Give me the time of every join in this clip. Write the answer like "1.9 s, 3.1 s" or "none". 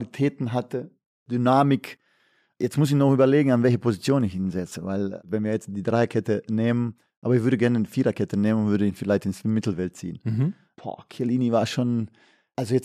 none